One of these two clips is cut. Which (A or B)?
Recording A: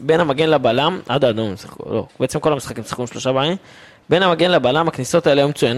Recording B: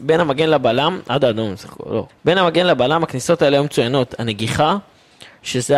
B